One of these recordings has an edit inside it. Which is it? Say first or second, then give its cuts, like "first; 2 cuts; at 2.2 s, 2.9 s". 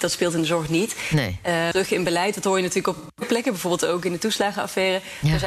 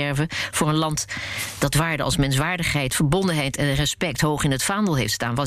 first; 1 cut; at 1.7 s